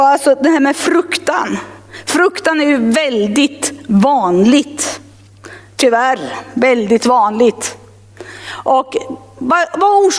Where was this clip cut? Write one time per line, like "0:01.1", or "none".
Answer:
none